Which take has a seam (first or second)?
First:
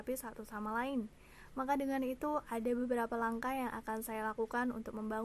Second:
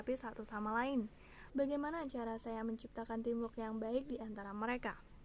second